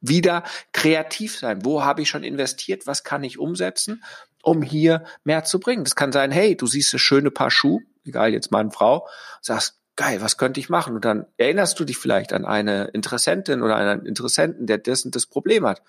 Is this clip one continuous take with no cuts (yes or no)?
yes